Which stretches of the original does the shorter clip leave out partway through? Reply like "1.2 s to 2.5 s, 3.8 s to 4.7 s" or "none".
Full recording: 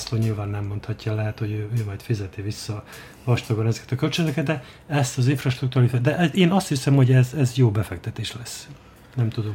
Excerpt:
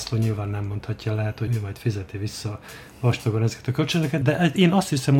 1.5 s to 1.7 s, 4.5 s to 6.0 s